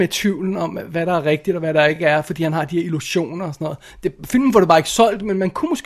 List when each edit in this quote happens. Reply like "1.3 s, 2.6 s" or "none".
none